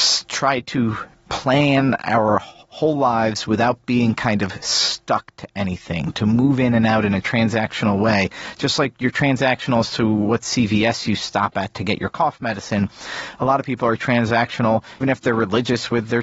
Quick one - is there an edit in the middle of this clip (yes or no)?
yes